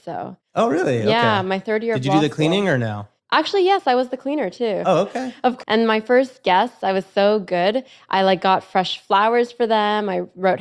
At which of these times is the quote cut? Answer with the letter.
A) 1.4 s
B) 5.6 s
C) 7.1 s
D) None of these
B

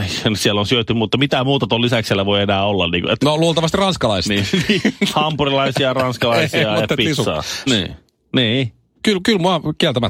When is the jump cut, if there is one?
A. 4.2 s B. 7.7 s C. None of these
B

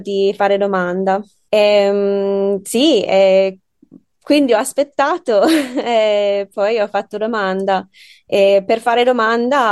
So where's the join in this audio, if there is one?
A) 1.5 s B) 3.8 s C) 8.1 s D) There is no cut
A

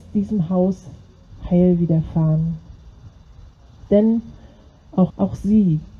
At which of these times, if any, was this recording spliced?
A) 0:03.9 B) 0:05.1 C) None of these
B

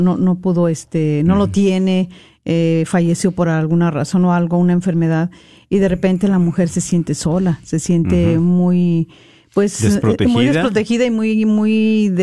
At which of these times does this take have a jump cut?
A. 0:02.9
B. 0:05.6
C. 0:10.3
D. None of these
D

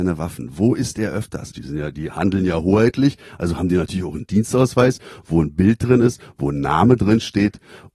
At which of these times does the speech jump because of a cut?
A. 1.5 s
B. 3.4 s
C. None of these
A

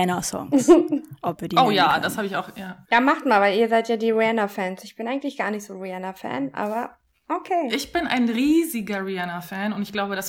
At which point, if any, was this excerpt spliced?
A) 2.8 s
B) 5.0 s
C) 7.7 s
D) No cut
A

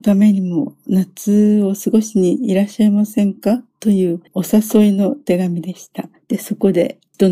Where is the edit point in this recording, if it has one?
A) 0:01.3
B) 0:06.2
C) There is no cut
B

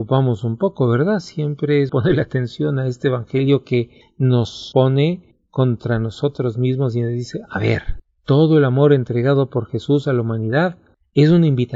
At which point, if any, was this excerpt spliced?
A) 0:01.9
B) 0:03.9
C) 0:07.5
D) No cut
A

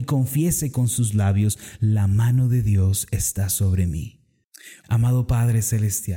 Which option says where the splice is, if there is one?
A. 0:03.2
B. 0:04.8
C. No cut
B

